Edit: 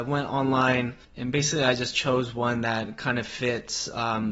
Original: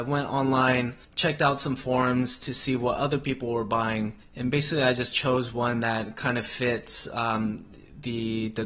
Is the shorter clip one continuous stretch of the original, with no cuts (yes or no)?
no